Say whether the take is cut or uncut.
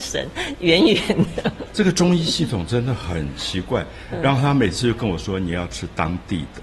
uncut